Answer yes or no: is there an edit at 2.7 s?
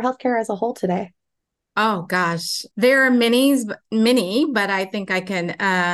yes